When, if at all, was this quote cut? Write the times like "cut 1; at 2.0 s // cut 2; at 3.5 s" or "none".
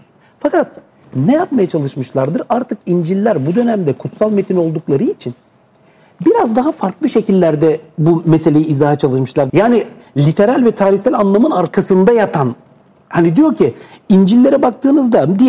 cut 1; at 9.5 s